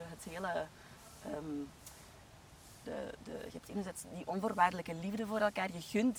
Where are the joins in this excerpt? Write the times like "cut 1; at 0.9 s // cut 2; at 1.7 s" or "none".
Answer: cut 1; at 2.8 s